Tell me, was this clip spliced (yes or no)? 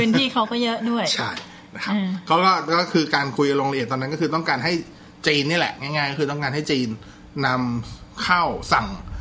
no